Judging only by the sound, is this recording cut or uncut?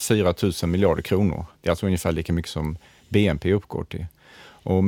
uncut